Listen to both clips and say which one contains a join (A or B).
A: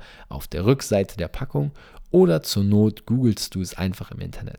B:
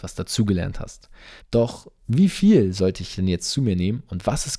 B